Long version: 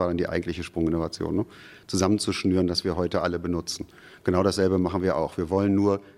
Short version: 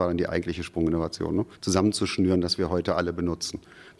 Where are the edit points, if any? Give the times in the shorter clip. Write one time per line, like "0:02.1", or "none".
0:01.6